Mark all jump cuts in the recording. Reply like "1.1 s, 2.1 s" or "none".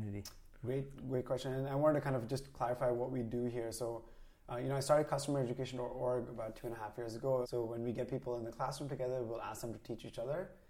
7.4 s